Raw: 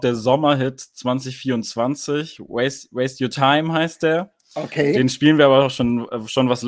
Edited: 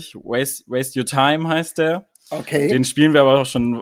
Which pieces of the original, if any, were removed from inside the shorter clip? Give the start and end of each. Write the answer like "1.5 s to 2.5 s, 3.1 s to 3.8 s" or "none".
none